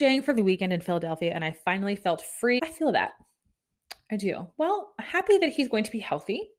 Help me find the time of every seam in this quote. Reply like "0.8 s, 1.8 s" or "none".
2.6 s